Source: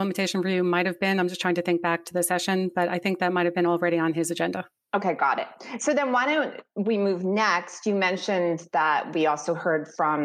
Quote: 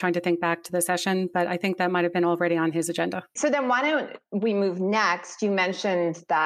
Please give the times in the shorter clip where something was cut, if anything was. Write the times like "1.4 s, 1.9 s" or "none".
3.4 s